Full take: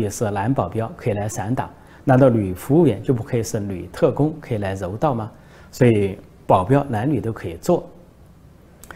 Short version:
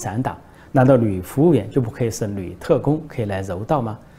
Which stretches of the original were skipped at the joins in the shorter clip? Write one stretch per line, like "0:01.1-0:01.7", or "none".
none